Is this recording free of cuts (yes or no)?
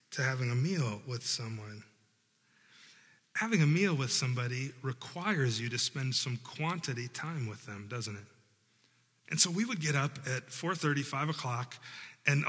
no